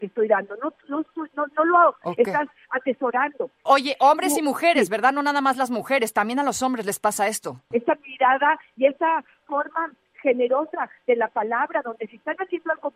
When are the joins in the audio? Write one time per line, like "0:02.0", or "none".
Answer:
0:03.7
0:07.7